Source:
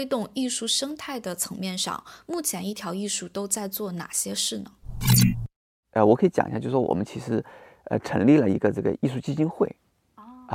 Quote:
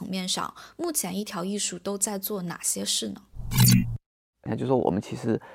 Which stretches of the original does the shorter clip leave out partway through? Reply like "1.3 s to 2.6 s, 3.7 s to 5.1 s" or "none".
6.0 s to 6.5 s